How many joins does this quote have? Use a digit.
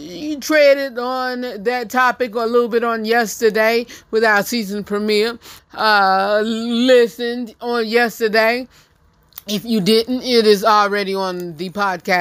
1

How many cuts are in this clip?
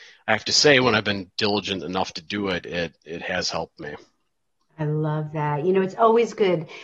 0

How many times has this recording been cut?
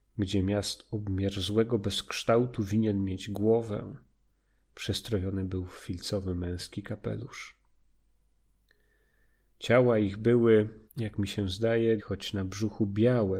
2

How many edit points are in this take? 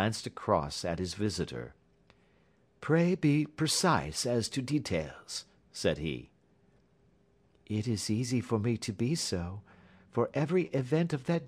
0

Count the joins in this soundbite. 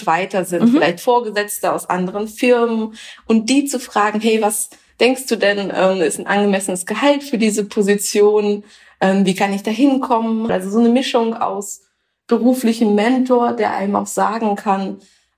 1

